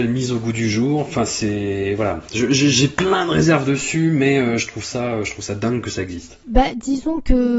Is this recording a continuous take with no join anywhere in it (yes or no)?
yes